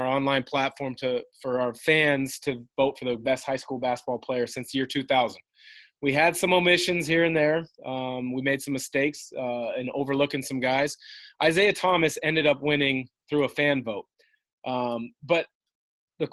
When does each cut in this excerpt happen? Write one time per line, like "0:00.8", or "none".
none